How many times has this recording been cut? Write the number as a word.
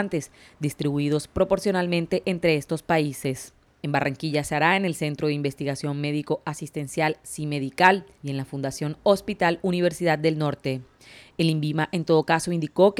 one